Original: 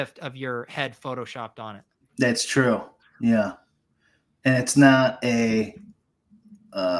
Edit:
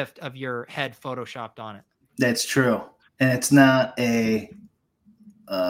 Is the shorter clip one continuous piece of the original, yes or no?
no